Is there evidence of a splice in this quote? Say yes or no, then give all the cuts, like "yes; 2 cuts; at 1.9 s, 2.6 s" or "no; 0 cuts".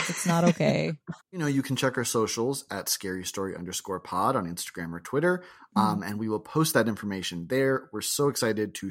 yes; 1 cut; at 1.2 s